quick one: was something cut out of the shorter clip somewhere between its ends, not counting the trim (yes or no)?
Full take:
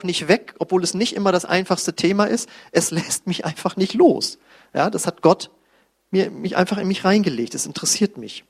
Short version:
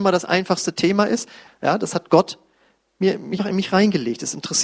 yes